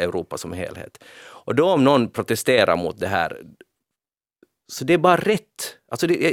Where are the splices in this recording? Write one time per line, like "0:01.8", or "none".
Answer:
none